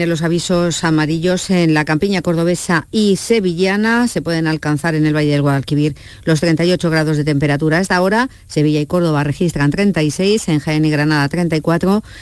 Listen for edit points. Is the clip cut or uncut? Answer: uncut